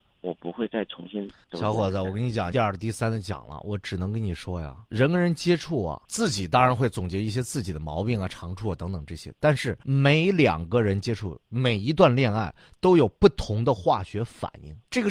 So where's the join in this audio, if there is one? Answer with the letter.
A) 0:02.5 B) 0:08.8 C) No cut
A